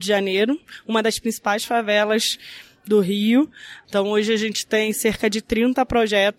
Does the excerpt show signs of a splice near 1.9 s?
no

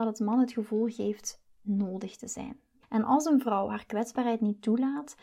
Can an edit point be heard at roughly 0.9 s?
no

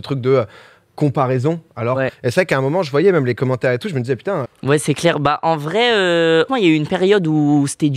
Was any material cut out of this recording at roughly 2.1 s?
yes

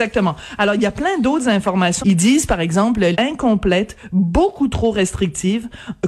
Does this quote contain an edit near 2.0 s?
yes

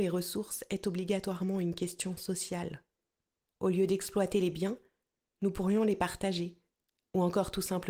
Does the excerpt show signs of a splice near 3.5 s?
no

